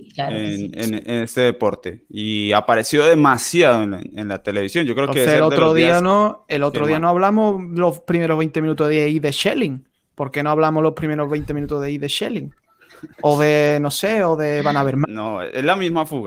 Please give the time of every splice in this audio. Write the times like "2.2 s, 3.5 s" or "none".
13.1 s, 15.0 s